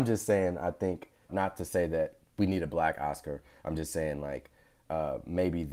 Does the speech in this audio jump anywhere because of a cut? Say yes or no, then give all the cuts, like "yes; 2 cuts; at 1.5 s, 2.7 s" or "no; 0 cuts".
yes; 1 cut; at 1.3 s